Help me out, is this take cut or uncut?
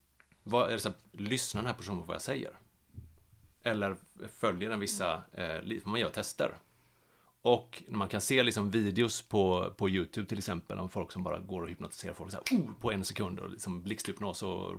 uncut